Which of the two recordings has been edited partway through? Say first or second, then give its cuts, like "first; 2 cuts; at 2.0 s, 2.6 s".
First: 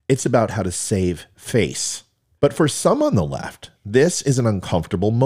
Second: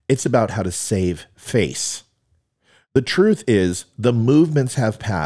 first; 1 cut; at 2.4 s